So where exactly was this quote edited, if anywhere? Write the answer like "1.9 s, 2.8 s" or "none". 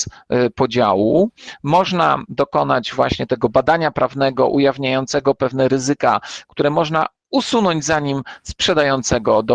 none